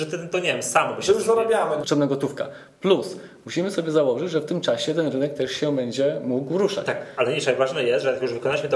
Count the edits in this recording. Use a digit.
1